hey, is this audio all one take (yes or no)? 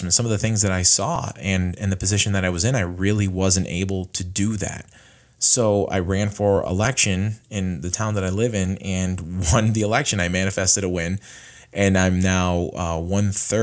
yes